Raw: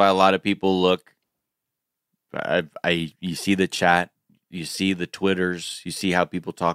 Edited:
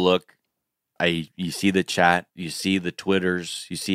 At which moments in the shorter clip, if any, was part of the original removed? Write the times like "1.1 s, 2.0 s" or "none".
1.0 s, 2.3 s